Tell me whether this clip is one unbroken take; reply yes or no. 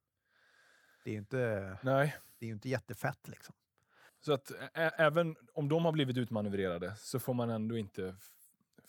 no